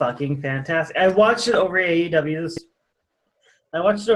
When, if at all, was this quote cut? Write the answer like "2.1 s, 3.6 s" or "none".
none